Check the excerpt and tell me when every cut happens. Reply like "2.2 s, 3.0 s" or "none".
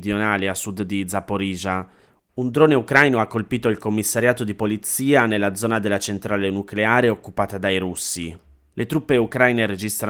8.7 s